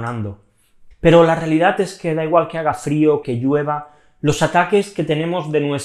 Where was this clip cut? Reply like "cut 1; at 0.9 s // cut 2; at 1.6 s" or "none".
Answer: cut 1; at 0.9 s // cut 2; at 3.2 s